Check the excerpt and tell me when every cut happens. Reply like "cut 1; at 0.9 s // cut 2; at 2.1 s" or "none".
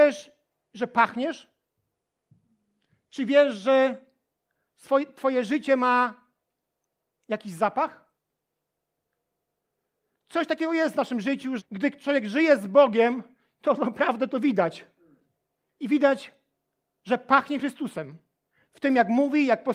cut 1; at 11.6 s

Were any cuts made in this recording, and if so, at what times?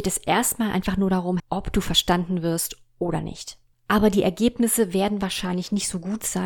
cut 1; at 1.4 s // cut 2; at 3.7 s

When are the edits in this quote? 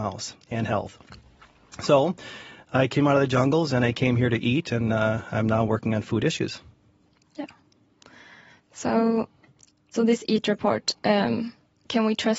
none

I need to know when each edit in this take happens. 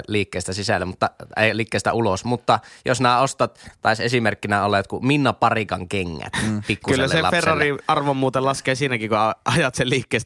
none

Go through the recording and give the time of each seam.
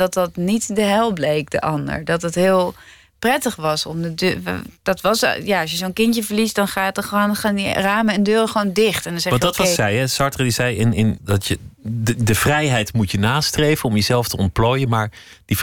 cut 1; at 9.8 s // cut 2; at 11.2 s

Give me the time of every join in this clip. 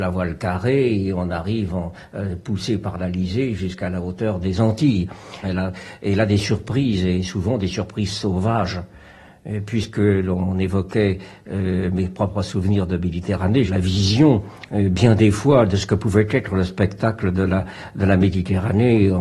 cut 1; at 5.4 s // cut 2; at 13.7 s

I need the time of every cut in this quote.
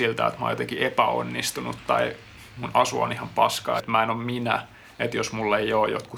cut 1; at 3.8 s

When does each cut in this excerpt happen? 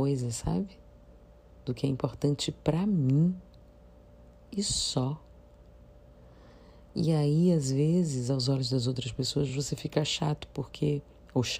none

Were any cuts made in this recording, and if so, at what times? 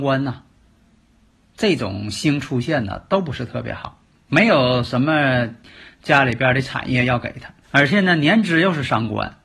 cut 1; at 4.2 s // cut 2; at 7.6 s

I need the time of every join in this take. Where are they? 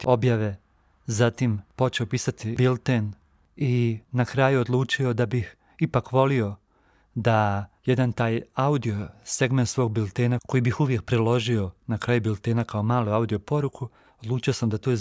cut 1; at 7.8 s

